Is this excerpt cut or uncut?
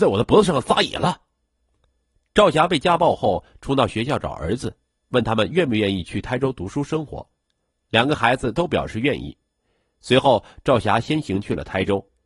uncut